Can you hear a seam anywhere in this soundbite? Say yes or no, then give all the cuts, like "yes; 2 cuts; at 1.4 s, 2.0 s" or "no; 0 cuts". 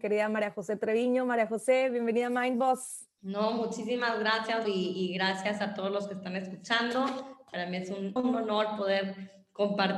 yes; 2 cuts; at 4.6 s, 8.2 s